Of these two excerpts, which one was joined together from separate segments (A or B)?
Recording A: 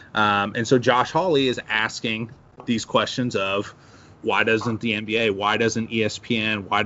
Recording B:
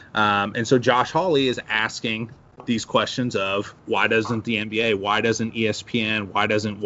B